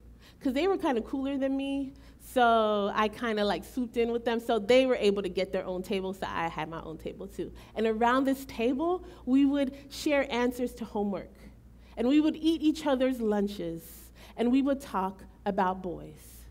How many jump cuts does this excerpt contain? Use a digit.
0